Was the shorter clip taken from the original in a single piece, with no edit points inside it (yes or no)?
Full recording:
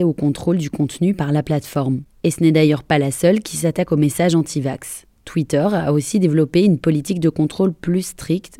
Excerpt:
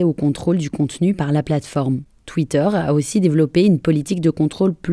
no